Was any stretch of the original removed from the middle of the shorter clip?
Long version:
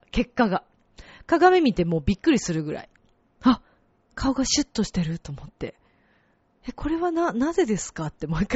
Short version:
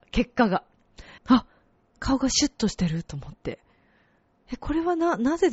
yes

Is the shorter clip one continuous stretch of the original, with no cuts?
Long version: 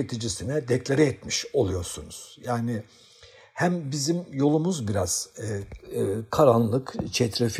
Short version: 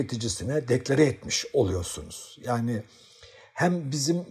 yes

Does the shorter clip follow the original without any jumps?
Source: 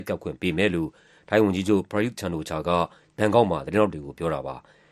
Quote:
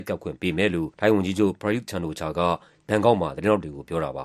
no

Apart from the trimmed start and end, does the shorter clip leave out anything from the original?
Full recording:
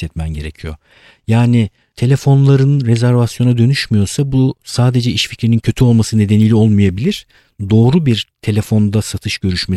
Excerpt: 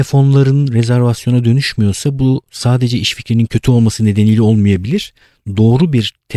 no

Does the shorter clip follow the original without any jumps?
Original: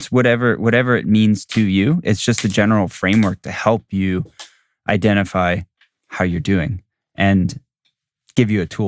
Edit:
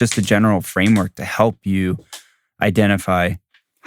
yes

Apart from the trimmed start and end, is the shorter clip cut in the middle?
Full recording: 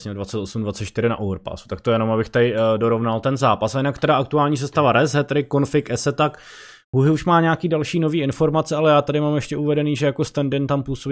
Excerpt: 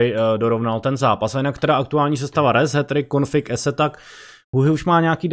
no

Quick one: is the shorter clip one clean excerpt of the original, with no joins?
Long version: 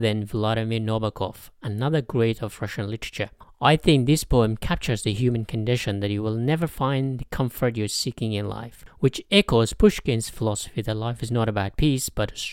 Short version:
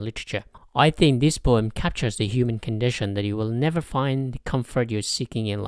yes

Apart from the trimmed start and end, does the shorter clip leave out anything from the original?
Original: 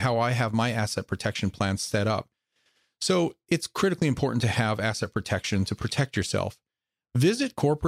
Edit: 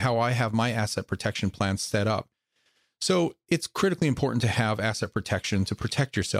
no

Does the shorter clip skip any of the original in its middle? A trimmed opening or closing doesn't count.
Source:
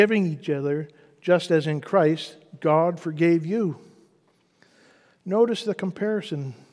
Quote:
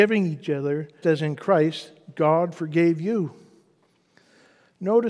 yes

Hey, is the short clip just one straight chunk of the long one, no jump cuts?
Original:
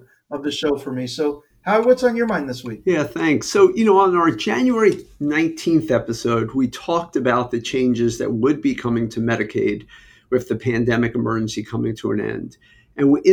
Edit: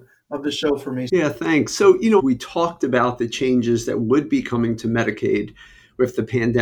no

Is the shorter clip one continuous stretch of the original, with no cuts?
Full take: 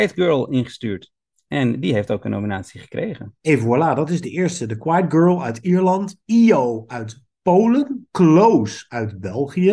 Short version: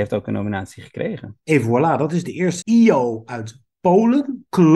no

